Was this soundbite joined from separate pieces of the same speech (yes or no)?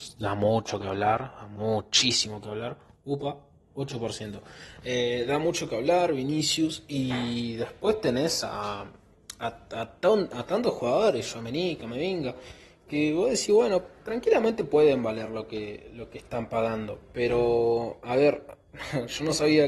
no